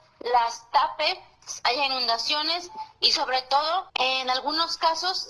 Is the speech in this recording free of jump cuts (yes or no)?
no